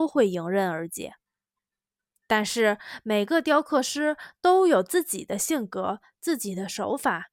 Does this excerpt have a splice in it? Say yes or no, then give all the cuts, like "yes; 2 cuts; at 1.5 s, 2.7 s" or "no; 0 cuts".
no; 0 cuts